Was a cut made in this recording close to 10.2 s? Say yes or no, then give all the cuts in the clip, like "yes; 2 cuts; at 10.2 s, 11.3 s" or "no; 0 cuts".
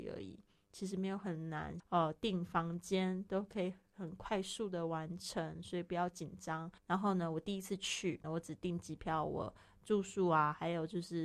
no; 3 cuts; at 1.8 s, 6.8 s, 8.2 s